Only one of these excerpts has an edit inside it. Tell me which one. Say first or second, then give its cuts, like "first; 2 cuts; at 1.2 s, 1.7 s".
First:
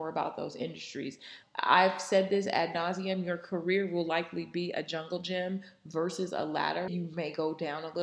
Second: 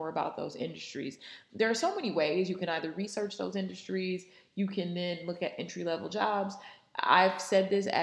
first; 2 cuts; at 1.4 s, 6.9 s